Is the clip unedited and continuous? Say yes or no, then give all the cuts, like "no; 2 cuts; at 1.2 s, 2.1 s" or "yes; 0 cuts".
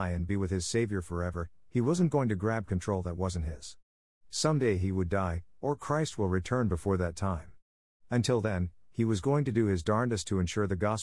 yes; 0 cuts